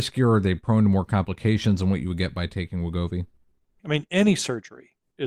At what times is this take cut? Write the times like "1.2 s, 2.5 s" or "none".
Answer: 3.8 s